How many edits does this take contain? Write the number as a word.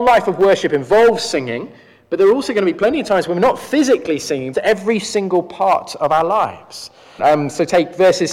two